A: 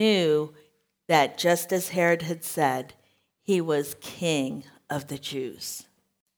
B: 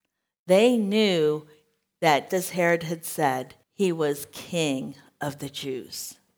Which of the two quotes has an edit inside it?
B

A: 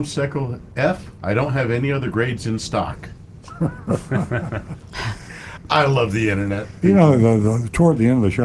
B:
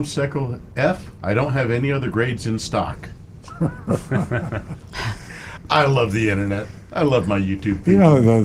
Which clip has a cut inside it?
A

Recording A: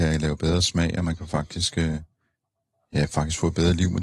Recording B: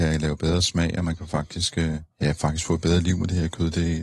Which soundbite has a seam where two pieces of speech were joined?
B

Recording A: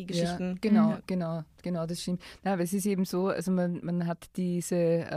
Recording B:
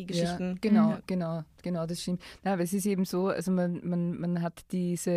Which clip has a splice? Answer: A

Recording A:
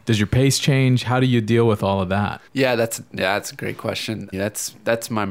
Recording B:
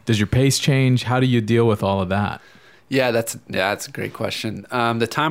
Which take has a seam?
A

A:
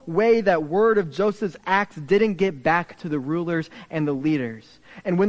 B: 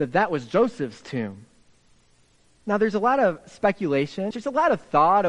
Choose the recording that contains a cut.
B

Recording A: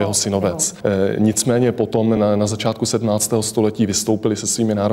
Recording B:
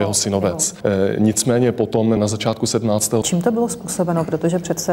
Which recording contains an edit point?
B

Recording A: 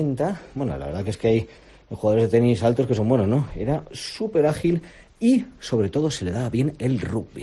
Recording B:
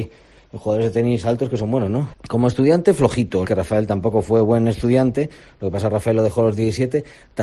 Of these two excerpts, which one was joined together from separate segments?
B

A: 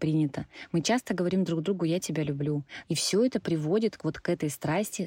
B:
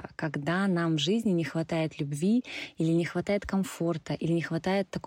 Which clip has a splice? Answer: A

